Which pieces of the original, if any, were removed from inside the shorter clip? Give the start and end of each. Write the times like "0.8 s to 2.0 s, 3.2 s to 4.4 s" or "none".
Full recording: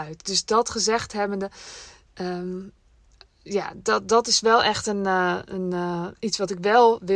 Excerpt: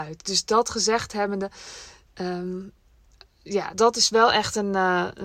3.7 s to 4.0 s